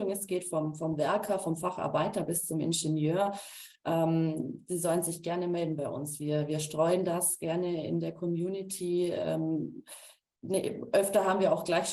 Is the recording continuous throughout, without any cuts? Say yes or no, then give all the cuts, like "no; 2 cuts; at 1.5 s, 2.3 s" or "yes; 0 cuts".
yes; 0 cuts